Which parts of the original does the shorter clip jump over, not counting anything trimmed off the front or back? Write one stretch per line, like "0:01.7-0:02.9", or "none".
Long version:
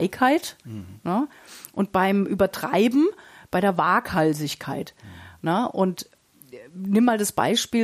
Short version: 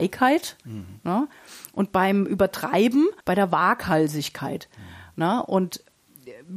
0:03.2-0:03.5